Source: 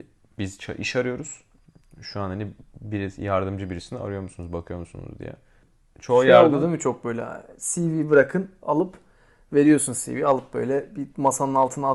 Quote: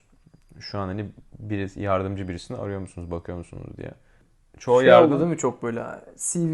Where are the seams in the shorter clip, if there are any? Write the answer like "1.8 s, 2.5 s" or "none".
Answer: none